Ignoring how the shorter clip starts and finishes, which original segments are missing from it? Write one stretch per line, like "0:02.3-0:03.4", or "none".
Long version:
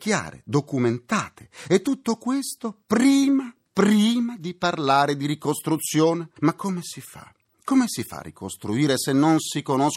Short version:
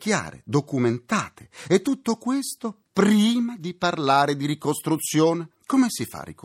0:02.8-0:03.6
0:06.3-0:07.5